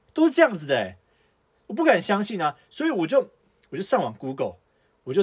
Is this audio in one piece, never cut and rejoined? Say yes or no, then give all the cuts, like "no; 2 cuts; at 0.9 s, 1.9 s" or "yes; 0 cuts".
yes; 0 cuts